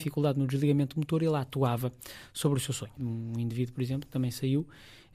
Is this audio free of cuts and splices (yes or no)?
no